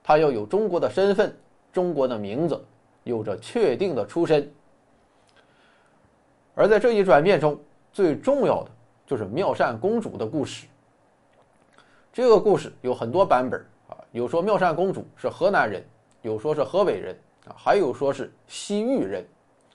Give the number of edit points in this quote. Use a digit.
0